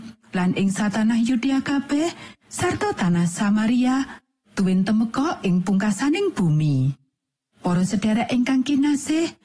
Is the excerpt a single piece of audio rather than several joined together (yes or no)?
yes